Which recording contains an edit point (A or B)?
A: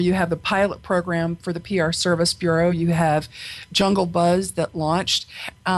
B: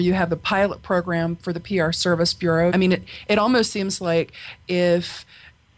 B